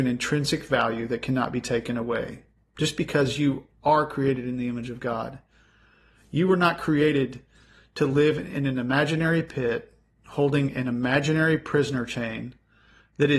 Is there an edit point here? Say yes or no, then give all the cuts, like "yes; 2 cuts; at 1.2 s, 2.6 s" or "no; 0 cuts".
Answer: no; 0 cuts